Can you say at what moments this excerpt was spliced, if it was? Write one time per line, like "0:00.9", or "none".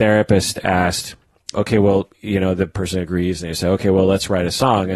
0:01.5